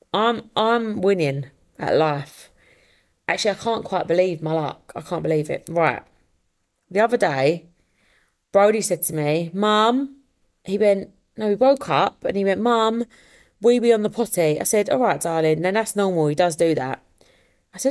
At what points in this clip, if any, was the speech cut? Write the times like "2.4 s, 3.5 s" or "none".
none